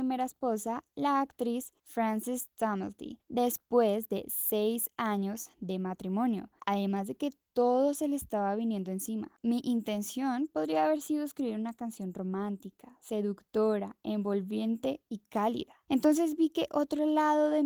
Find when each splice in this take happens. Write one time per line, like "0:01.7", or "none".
0:06.6
0:09.3

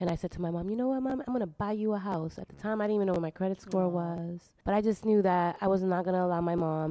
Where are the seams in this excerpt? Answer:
0:04.6

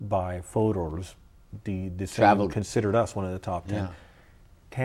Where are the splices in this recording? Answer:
0:02.5

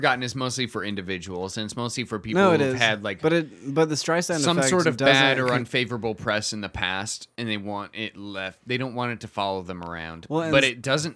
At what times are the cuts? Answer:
none

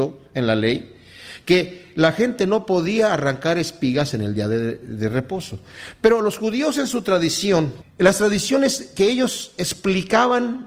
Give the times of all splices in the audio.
0:07.8

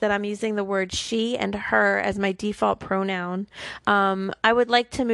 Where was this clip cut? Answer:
0:03.8

